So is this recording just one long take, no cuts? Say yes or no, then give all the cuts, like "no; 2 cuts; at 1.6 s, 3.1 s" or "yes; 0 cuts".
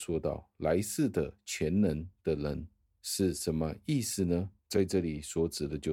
no; 1 cut; at 4.6 s